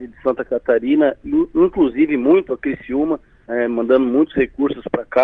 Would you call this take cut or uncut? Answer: uncut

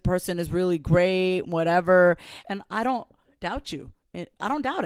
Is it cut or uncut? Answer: cut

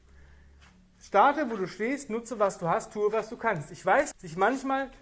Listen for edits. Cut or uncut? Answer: cut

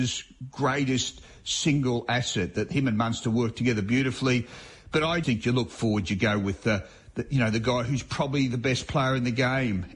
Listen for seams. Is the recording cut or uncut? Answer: cut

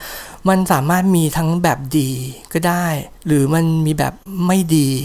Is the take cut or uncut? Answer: cut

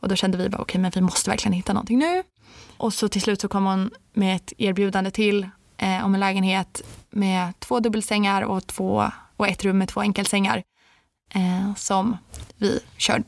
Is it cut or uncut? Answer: cut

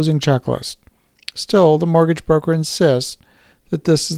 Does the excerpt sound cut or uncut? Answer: uncut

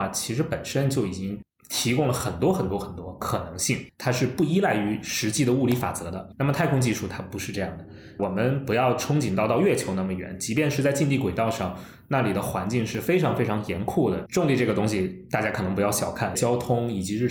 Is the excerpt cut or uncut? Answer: cut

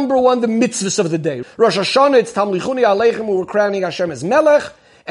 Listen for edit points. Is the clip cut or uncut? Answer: cut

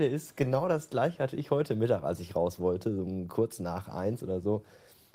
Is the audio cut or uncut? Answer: uncut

